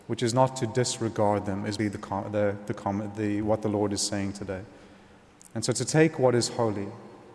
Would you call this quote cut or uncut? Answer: cut